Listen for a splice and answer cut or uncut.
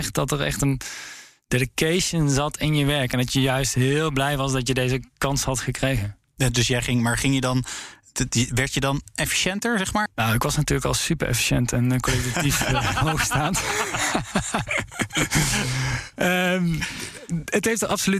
cut